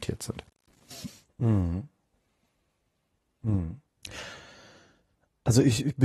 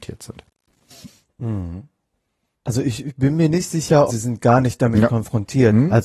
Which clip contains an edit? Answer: second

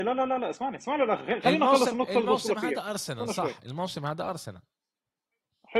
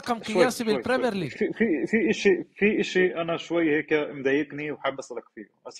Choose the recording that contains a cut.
second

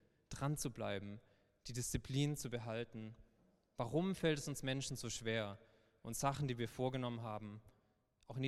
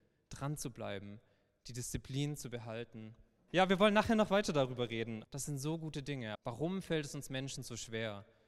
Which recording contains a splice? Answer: second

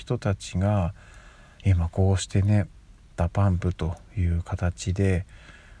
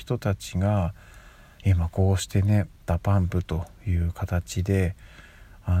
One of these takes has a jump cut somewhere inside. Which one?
second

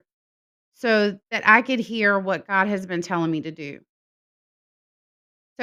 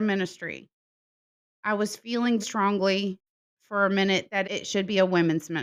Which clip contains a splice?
second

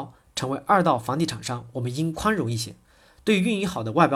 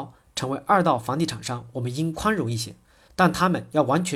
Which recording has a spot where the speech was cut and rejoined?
second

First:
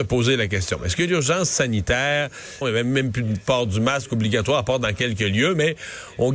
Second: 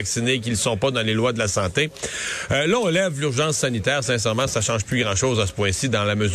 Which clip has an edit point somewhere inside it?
first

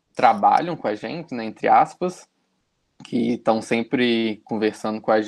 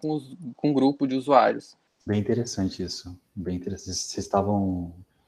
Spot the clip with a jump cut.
second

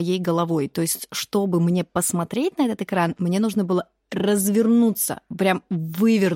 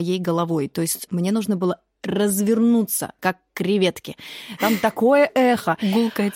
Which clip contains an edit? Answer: second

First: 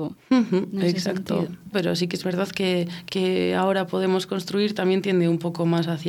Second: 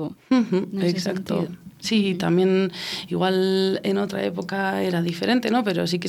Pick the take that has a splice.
first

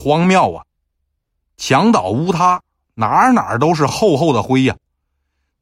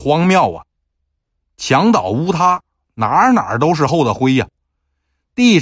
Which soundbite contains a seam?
second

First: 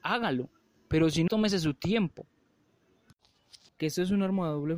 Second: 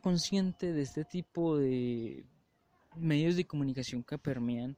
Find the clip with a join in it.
first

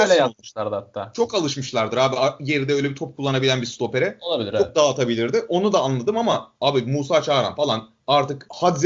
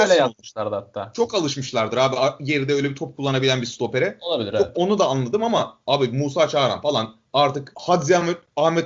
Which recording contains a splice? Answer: second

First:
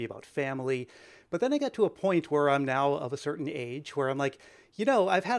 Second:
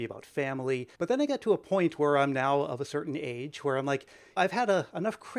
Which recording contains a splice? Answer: second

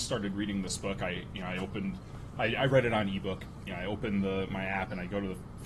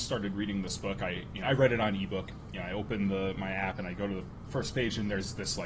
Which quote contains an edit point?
second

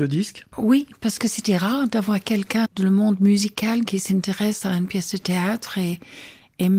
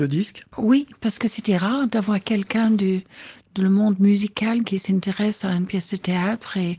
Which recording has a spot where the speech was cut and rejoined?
first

